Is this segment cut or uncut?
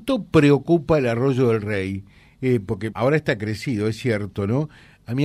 cut